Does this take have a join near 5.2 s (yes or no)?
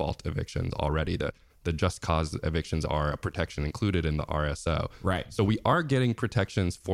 no